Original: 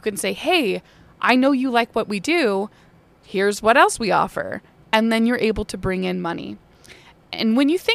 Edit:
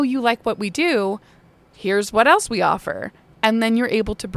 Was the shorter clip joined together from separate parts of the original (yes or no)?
no